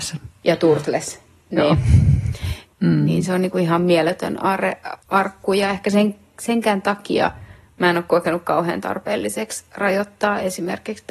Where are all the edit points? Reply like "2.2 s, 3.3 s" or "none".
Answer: 2.7 s, 5.0 s